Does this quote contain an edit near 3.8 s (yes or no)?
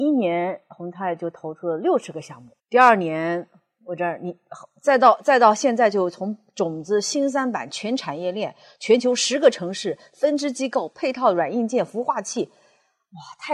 no